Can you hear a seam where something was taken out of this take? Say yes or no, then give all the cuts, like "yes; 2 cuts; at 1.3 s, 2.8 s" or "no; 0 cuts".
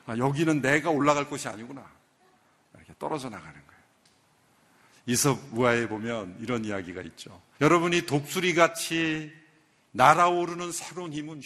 yes; 1 cut; at 7.6 s